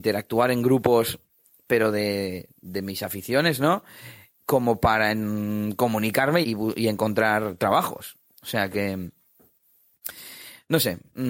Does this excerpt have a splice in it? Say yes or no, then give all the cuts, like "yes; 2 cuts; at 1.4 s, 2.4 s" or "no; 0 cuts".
yes; 1 cut; at 6.4 s